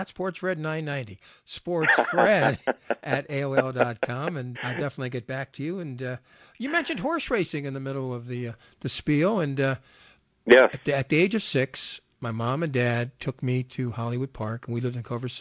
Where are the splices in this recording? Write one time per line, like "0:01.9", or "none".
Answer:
0:04.5